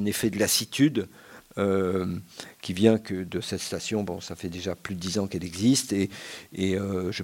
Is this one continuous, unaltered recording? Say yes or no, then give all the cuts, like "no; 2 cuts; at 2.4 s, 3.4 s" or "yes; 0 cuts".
yes; 0 cuts